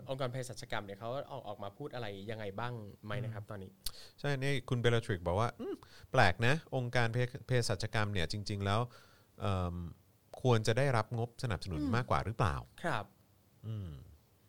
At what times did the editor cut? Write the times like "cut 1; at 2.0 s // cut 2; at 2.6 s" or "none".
cut 1; at 3.0 s